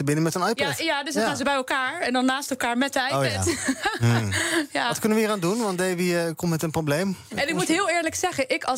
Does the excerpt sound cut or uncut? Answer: uncut